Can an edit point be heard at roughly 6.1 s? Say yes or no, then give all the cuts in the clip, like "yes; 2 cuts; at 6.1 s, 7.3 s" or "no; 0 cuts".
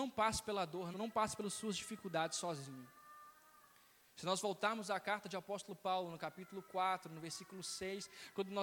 no; 1 cut; at 0.9 s